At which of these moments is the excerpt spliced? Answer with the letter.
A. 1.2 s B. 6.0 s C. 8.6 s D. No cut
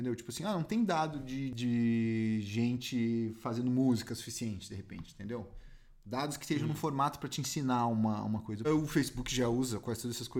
C